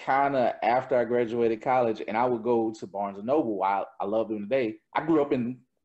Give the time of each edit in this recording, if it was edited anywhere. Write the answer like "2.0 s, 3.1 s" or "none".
4.9 s